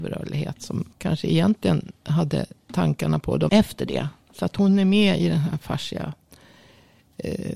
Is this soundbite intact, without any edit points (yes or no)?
no